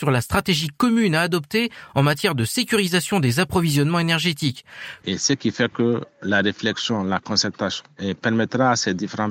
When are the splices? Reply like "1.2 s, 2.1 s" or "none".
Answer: 5.0 s